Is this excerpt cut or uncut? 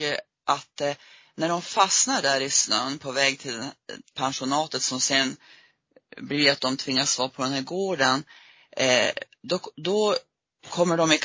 uncut